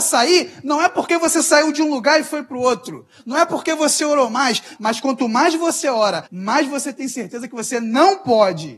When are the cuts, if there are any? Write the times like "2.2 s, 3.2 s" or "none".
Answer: 4.8 s, 6.3 s